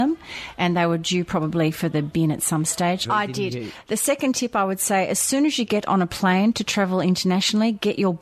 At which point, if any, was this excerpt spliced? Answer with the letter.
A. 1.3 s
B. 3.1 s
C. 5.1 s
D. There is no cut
B